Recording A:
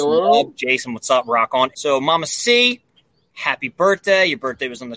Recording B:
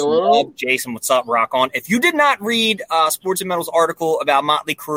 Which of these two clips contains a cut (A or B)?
A